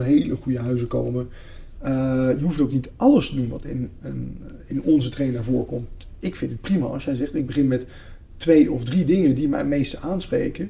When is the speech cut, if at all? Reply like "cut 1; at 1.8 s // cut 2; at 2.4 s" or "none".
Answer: cut 1; at 1.8 s